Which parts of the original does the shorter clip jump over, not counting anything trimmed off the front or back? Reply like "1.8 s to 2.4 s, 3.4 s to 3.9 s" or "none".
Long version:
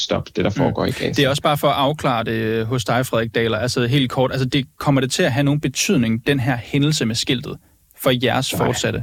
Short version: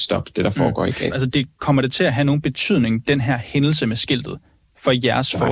1.1 s to 4.3 s